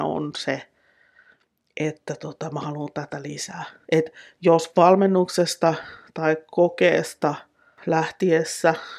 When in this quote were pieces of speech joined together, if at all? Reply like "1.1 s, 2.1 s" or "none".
3.8 s